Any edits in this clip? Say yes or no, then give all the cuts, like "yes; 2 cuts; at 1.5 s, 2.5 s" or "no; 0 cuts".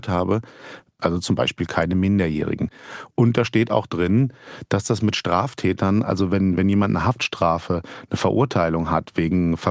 yes; 1 cut; at 1.0 s